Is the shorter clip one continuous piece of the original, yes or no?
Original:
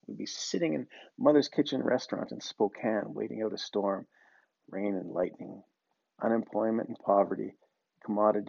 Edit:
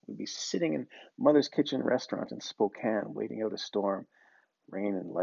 yes